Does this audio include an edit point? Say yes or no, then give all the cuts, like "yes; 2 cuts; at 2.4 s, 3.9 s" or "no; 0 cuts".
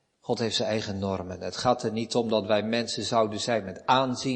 no; 0 cuts